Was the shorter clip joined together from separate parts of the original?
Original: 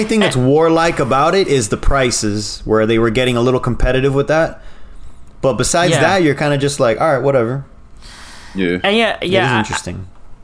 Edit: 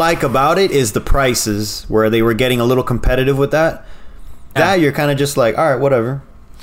yes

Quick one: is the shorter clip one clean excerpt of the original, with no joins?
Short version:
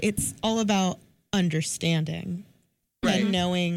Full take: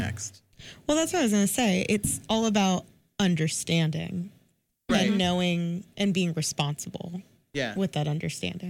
yes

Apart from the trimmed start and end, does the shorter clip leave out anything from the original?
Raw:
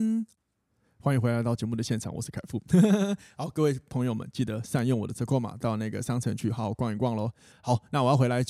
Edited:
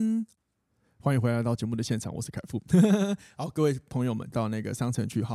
yes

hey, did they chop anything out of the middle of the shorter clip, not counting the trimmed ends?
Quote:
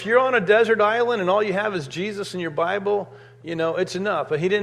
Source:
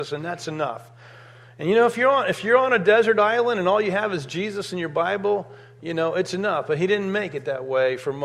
no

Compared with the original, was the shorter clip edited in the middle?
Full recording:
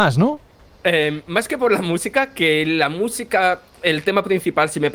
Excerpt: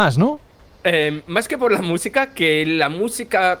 no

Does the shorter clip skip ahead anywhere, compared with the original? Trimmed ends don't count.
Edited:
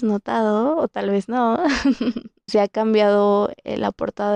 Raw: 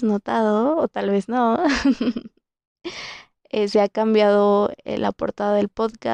yes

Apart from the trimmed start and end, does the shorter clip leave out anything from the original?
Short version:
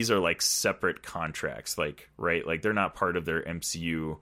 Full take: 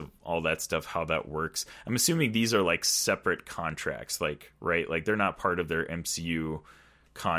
no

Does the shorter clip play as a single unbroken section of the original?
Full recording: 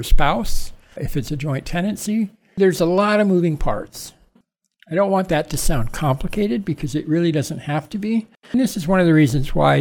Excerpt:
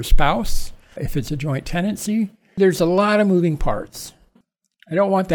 yes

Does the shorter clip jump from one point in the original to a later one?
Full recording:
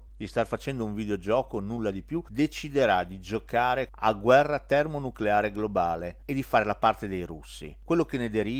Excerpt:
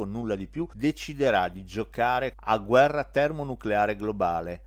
no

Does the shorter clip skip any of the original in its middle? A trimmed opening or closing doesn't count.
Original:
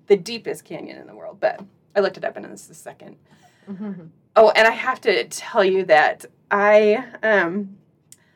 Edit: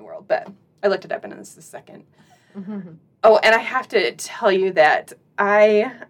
no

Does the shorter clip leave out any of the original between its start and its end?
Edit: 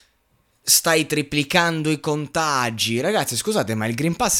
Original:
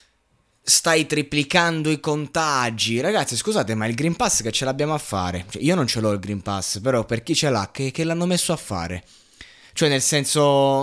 no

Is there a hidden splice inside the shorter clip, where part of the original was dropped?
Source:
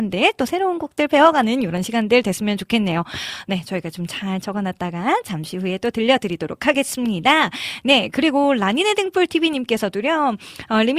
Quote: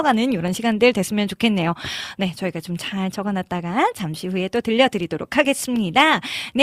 no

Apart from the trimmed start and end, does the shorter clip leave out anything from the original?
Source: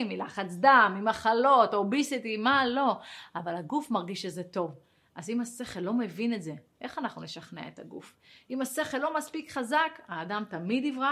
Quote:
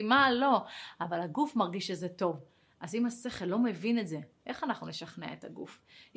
no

